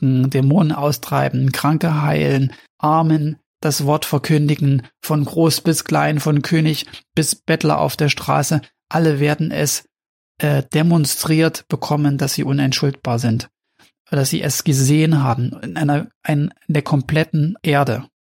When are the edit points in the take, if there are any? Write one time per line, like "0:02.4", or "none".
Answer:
none